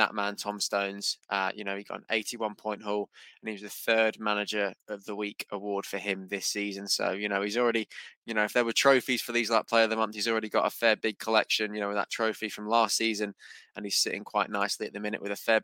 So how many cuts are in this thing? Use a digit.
0